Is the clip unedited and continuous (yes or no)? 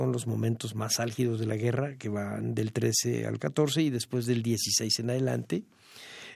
yes